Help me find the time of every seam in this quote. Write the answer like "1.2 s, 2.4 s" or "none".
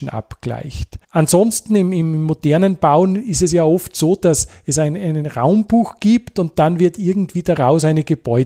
none